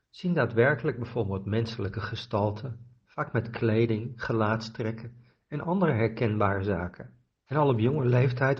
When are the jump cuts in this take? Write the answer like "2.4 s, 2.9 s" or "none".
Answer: 7.5 s